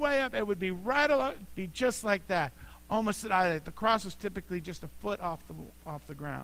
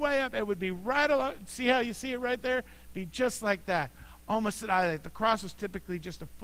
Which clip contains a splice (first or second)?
first